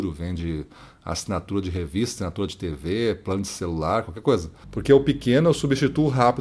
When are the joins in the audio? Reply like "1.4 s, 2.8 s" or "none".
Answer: 4.6 s